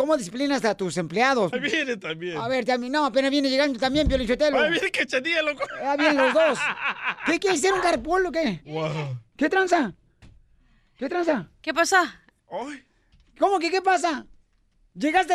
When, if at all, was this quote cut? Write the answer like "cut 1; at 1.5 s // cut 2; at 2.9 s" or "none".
cut 1; at 1.5 s

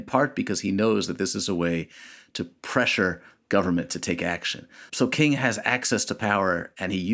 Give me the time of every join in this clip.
cut 1; at 4.9 s

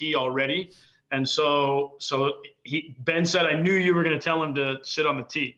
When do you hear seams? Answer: none

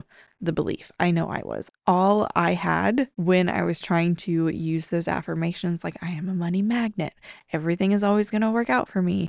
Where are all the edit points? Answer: cut 1; at 3.1 s

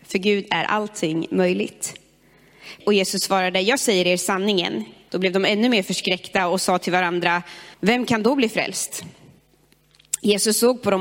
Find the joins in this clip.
cut 1; at 2.8 s // cut 2; at 5.1 s // cut 3; at 7.7 s

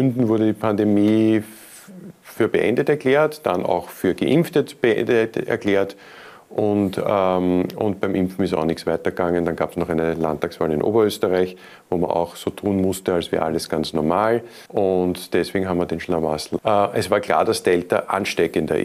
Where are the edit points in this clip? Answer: cut 1; at 14.7 s // cut 2; at 16.6 s

